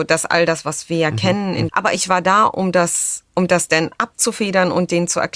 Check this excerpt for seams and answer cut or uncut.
cut